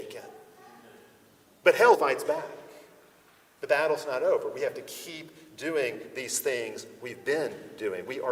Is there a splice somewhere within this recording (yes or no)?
yes